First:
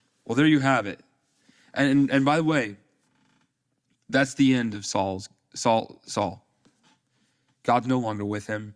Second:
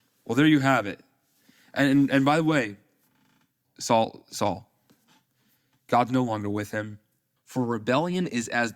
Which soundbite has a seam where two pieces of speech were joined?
second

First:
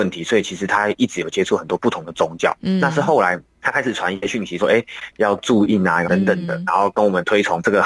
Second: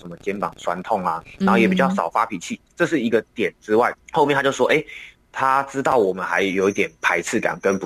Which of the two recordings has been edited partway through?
first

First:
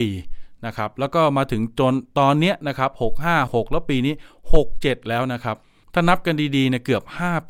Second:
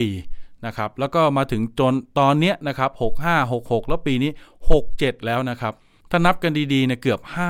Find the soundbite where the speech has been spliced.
first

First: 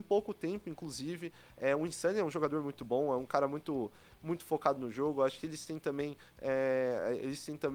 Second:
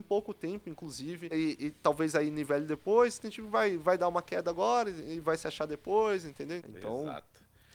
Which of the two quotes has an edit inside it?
second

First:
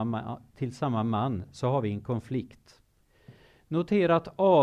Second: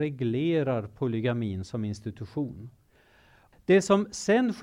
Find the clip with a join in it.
second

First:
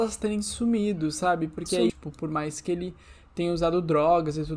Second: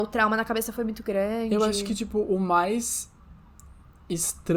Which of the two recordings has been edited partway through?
first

